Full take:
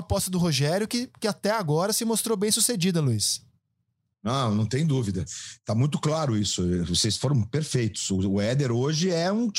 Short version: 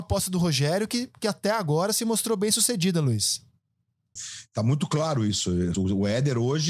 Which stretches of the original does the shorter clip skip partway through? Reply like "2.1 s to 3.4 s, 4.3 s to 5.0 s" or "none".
4.2 s to 5.3 s, 6.9 s to 8.1 s